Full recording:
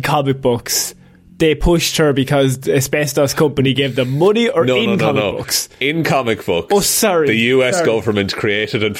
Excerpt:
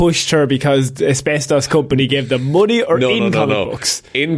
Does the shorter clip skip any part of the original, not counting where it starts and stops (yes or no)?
no